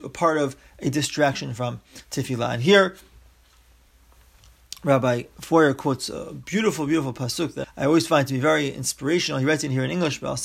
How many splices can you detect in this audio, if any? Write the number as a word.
one